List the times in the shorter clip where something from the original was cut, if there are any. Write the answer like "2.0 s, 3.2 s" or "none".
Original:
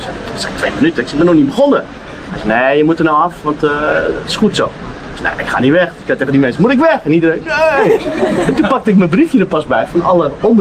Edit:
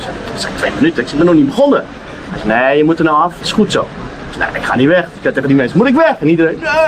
3.4 s